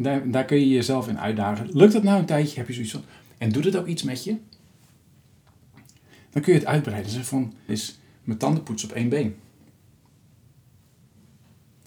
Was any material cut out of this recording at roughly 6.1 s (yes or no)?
no